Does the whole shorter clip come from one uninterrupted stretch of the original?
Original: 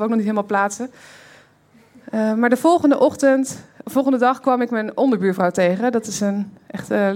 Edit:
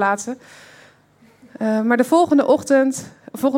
yes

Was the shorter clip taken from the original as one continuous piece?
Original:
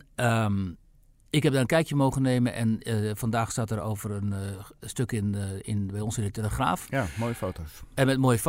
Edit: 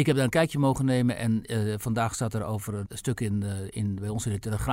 no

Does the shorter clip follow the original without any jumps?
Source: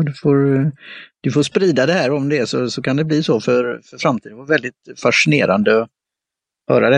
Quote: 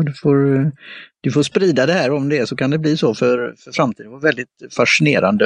no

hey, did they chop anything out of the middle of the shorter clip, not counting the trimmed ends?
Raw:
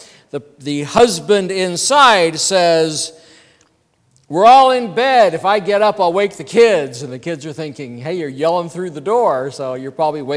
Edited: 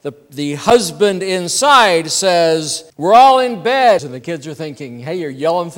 yes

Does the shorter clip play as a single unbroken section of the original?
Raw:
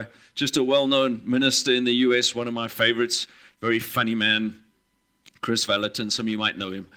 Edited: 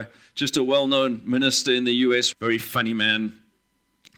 no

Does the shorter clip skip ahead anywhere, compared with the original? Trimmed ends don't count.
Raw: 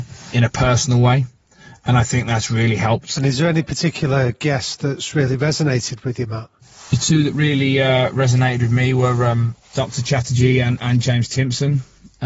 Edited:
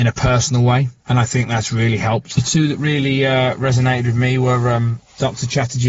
yes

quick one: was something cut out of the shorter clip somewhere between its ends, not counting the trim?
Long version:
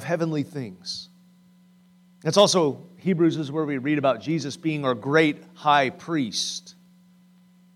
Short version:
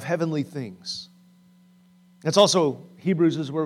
no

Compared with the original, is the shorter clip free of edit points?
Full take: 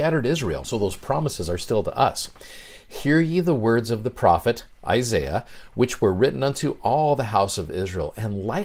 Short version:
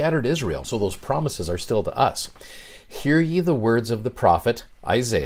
yes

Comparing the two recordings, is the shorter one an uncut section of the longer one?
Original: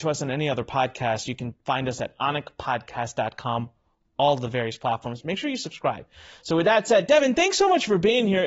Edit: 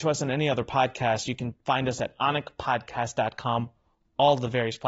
yes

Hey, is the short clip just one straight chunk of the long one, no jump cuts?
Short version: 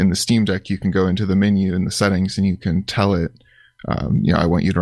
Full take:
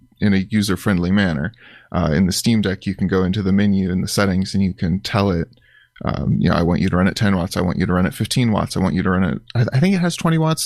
yes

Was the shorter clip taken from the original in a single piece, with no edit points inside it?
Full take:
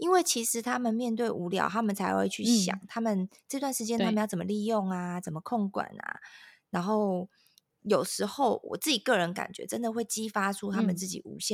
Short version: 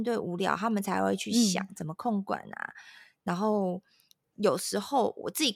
no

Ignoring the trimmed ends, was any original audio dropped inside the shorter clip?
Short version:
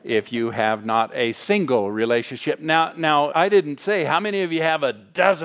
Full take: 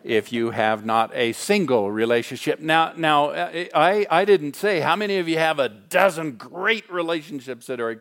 yes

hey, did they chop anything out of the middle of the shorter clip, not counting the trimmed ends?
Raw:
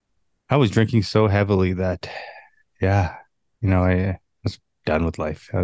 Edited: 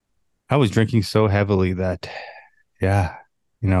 no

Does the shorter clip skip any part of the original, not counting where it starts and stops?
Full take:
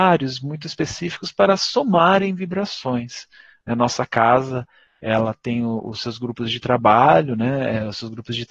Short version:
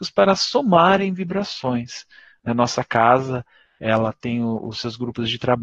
no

